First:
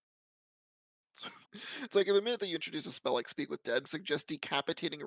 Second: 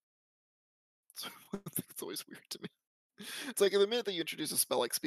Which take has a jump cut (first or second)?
first